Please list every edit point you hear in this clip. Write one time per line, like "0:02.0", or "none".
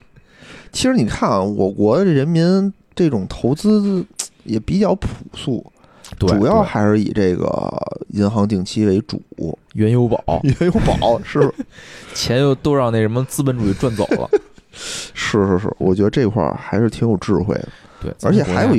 0:09.7
0:15.8